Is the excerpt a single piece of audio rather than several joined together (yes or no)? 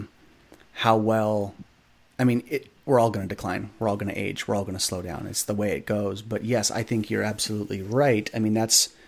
yes